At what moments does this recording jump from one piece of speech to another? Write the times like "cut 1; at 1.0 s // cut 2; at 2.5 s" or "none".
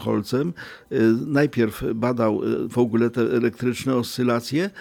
none